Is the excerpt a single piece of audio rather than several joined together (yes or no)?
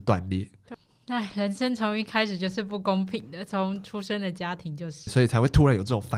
no